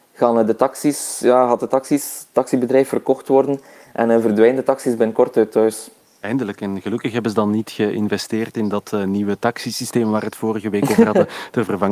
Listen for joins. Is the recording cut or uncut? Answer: uncut